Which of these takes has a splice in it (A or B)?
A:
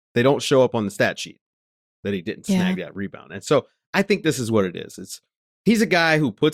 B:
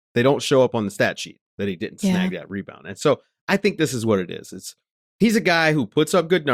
B